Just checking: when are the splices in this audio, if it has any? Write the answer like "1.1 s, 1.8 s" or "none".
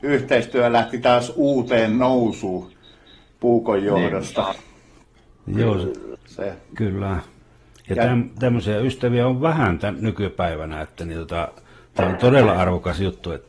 6.2 s